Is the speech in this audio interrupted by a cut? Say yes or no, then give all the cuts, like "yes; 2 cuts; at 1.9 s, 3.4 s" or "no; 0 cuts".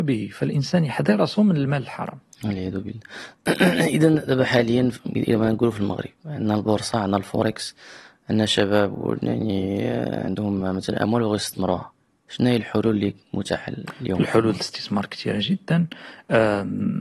no; 0 cuts